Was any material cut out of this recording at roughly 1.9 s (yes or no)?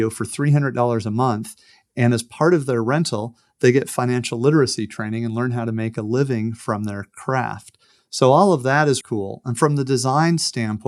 no